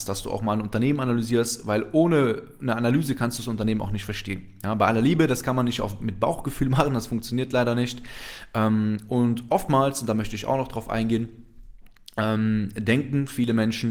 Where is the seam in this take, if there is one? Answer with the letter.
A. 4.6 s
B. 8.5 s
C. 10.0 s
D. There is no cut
D